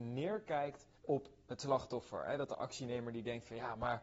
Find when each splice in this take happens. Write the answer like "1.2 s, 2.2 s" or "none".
1.0 s